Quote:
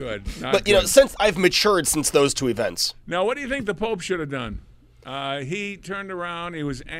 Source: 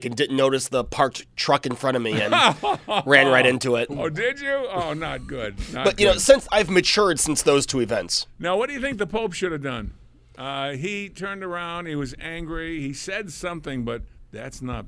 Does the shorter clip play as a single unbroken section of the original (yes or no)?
yes